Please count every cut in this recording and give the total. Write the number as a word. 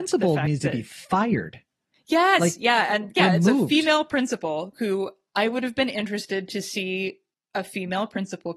one